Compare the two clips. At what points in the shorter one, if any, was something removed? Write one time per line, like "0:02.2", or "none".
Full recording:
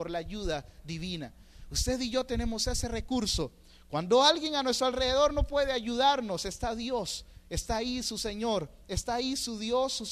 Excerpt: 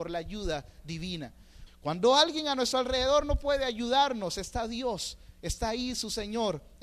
0:01.7